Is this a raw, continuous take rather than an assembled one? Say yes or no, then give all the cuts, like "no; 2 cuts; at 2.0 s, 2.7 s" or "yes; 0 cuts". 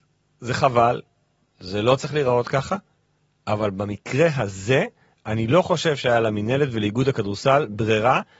yes; 0 cuts